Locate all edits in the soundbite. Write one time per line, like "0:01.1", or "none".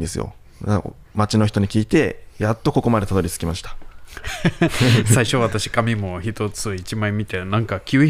none